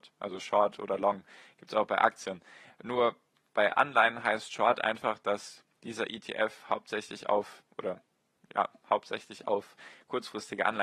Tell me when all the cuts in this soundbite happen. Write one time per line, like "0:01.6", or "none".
none